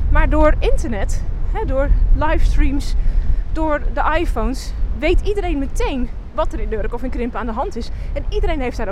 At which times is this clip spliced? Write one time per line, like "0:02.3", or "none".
none